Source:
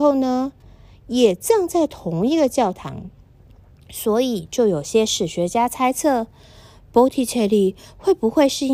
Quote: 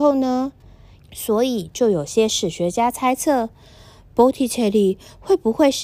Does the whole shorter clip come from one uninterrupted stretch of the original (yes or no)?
no